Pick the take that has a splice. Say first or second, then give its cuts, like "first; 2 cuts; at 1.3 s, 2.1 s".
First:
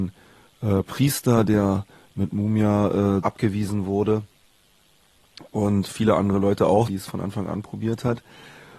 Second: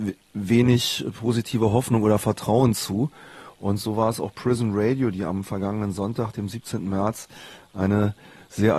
first; 2 cuts; at 3.2 s, 6.9 s